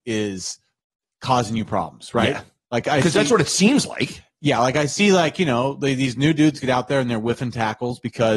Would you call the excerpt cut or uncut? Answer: uncut